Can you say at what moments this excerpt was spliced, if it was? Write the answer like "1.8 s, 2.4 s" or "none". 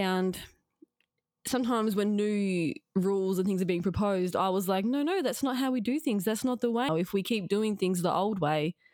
6.9 s